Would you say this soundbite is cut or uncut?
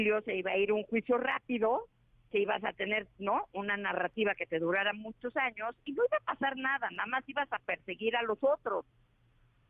uncut